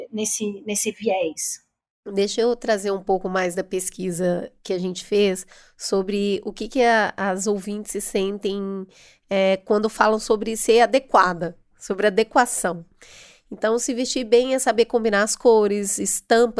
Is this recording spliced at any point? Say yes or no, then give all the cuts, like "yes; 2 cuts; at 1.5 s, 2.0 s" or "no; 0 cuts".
no; 0 cuts